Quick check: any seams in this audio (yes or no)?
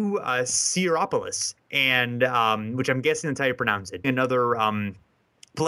yes